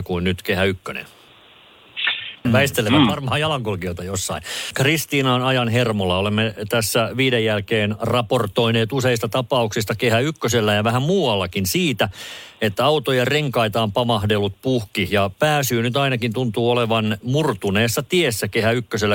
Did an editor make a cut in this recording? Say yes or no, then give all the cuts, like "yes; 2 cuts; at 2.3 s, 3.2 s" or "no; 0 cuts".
yes; 1 cut; at 2.4 s